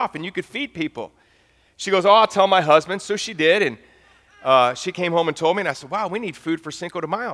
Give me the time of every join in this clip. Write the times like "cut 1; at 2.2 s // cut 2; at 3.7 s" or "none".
none